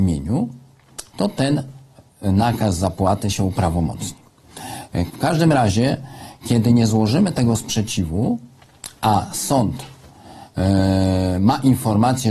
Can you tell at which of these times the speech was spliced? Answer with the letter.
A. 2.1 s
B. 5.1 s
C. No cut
B